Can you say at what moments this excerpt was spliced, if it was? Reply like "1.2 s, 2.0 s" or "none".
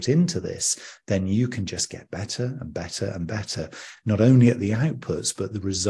none